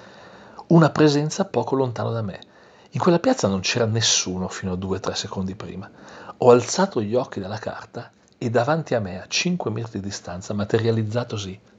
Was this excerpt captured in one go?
yes; 0 cuts

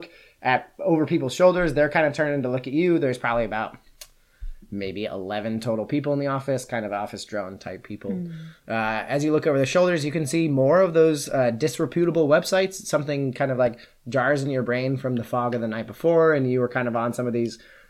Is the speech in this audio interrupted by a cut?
no; 0 cuts

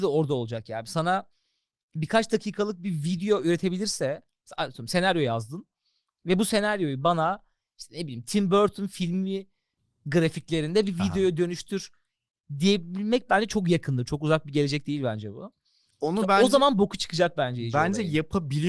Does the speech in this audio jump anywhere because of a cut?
no; 0 cuts

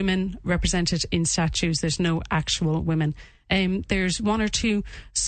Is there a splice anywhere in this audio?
no; 0 cuts

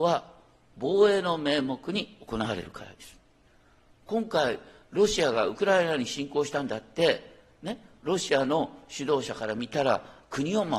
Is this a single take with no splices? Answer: yes; 0 cuts

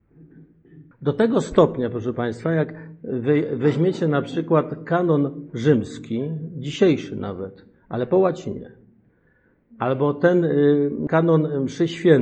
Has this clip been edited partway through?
yes; 2 cuts; at 0.9 s, 11.1 s

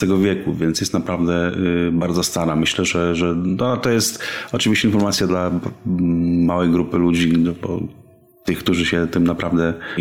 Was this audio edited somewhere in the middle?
no; 0 cuts

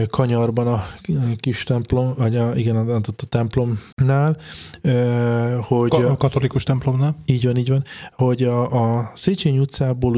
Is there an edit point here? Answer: yes; 1 cut; at 3.9 s

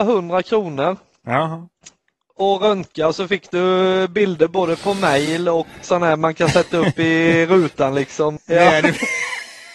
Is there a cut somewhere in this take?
yes; 2 cuts; at 5.8 s, 8.4 s

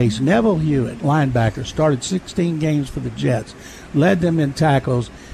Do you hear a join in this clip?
no; 0 cuts

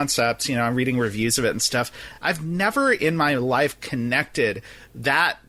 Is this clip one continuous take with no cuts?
yes; 0 cuts

